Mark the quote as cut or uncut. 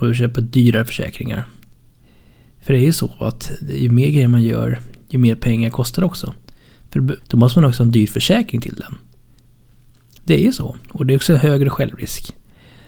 cut